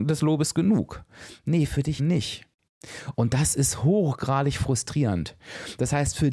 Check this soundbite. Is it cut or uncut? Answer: cut